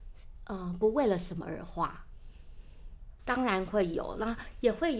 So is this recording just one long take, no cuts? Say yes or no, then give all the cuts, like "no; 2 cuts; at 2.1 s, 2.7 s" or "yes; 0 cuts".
no; 1 cut; at 3.2 s